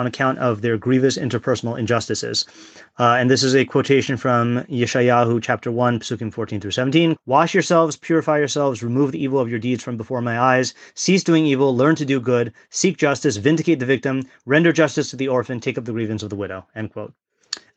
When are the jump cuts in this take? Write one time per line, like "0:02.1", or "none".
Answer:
0:07.2